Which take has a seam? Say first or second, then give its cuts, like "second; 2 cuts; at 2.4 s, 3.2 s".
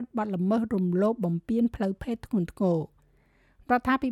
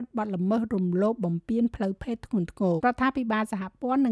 second; 1 cut; at 2.8 s